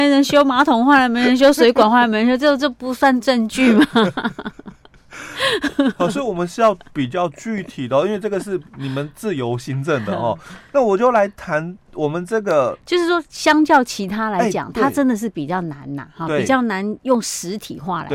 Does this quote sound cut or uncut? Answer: uncut